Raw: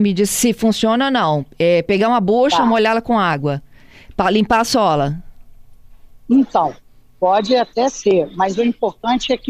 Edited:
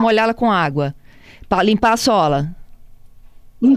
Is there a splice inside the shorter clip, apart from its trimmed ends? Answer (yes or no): no